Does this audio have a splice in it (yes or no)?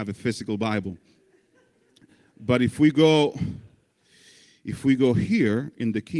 no